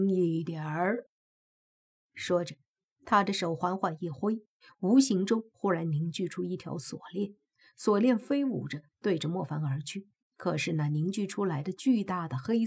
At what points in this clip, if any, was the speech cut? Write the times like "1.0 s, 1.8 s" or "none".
10.2 s